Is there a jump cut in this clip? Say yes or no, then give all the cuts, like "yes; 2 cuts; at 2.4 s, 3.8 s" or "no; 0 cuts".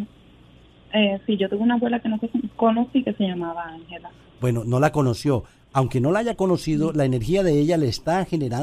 no; 0 cuts